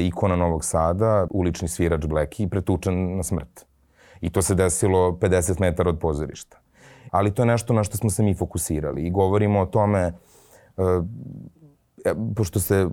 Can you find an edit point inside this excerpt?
yes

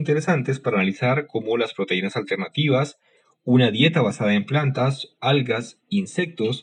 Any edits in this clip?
yes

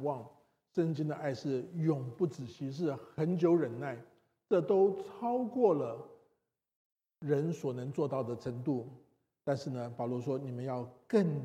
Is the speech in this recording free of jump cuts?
yes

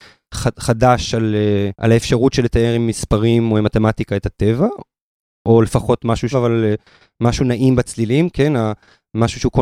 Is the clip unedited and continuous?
no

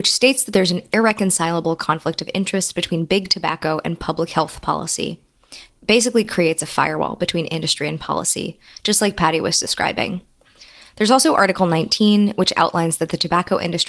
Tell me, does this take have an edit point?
no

